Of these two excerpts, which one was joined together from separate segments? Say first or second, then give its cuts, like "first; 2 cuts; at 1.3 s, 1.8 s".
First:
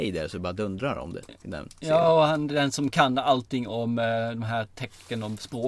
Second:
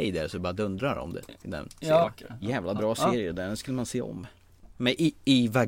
second; 1 cut; at 2.0 s